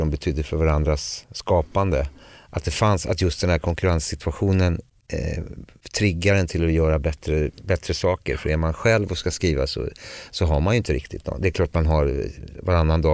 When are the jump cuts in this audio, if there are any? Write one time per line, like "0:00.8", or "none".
none